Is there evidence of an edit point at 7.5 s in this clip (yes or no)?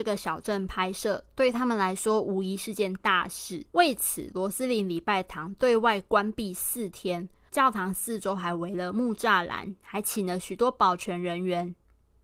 yes